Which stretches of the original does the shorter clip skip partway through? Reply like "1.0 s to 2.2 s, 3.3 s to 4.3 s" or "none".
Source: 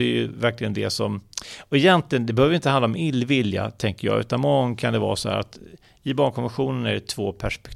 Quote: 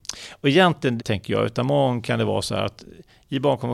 2.3 s to 3.7 s